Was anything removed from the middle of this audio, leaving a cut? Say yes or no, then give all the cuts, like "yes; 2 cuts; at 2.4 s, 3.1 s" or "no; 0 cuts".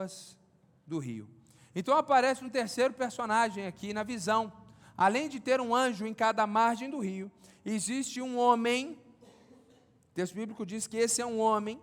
no; 0 cuts